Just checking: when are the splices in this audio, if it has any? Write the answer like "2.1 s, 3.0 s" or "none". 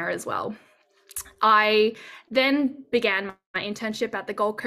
none